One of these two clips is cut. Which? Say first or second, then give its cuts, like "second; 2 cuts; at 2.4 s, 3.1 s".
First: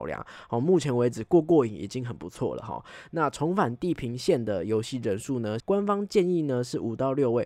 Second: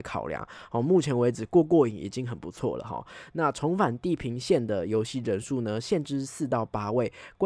first; 1 cut; at 5.6 s